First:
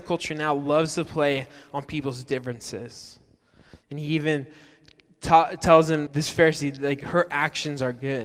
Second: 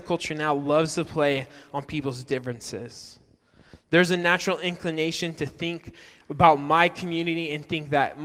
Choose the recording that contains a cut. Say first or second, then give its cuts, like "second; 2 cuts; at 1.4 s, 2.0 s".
first; 2 cuts; at 3.8 s, 6.1 s